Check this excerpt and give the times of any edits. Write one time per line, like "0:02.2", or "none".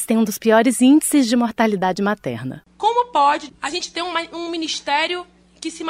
0:03.5